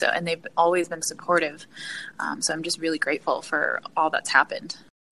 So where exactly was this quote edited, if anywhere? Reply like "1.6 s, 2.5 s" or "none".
1.0 s, 2.1 s